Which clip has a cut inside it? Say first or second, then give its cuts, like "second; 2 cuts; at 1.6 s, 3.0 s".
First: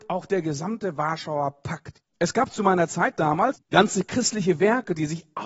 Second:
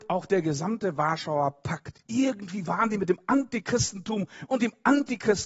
first; 2 cuts; at 2.0 s, 3.5 s